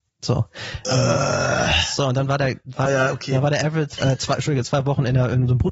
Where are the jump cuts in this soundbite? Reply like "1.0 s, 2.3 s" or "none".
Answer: 2.9 s, 4.0 s